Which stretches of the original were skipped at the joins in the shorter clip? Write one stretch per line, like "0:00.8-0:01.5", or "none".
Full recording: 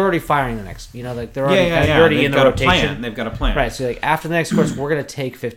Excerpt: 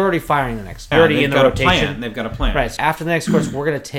0:00.9-0:01.9
0:03.8-0:04.0

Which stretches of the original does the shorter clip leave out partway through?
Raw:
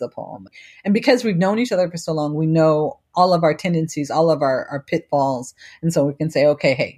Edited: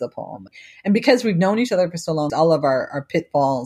0:02.3-0:04.1

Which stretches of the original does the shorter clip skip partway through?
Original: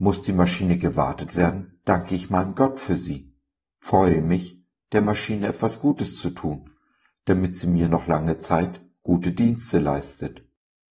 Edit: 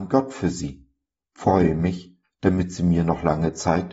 0:04.7-0:07.1

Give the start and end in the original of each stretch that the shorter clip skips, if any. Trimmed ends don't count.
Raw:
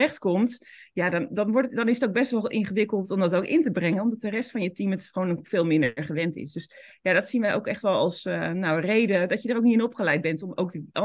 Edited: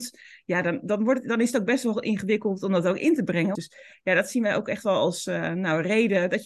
0:04.0-0:06.5

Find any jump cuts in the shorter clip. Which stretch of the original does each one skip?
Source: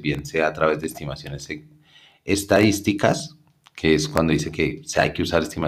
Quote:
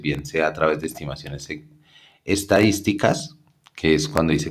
none

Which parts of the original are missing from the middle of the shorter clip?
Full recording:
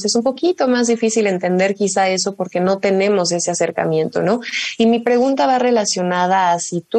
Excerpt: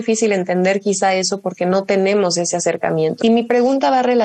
0:04.2-0:04.8

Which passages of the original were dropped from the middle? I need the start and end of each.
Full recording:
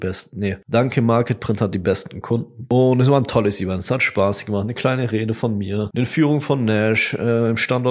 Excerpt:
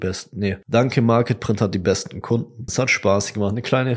0:02.7-0:03.8

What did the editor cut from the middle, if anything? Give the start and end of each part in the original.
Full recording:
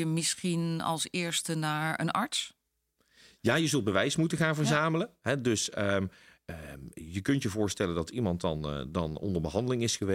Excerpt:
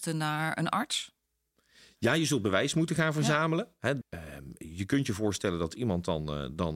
0:05.4-0:06.4

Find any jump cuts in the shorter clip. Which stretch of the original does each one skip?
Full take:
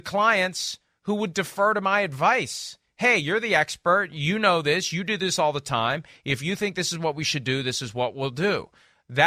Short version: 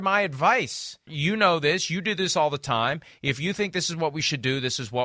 0:02.9-0:04.1

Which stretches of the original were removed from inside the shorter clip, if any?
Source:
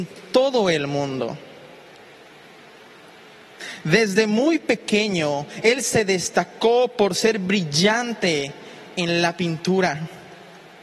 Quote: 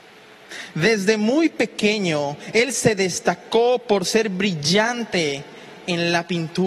none

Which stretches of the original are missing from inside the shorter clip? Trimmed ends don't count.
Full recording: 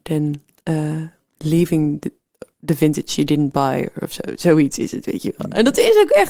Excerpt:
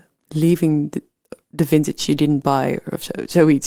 none

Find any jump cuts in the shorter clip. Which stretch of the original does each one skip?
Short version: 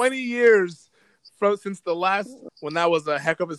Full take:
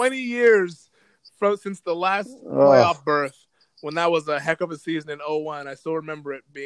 0:02.5-0:03.7

